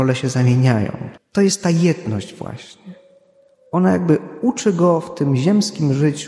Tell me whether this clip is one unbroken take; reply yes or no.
no